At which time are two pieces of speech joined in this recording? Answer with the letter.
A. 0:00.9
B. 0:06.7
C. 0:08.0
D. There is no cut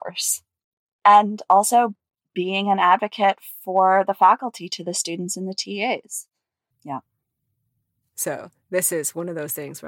B